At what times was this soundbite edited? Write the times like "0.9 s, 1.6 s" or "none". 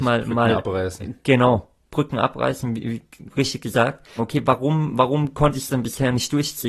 4.2 s